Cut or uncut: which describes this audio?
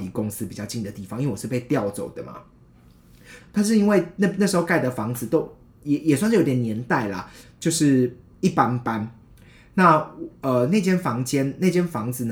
cut